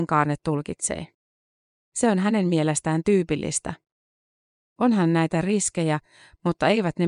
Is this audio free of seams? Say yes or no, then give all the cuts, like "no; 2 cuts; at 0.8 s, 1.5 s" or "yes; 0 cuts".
yes; 0 cuts